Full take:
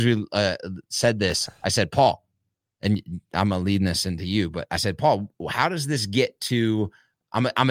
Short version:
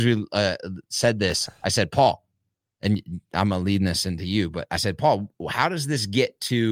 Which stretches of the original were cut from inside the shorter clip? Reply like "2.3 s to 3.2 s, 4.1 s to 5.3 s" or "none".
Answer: none